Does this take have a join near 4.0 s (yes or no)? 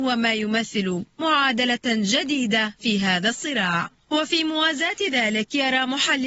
yes